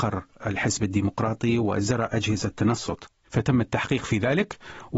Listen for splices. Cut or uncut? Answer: cut